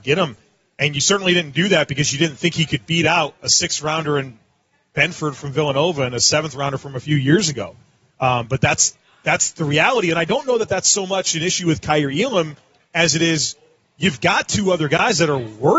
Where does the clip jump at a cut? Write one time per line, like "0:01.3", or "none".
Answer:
none